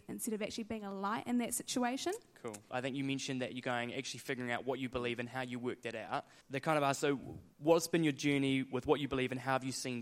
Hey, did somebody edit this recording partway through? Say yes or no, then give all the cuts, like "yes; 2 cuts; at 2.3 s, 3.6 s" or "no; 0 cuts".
yes; 3 cuts; at 2.7 s, 6.4 s, 7.5 s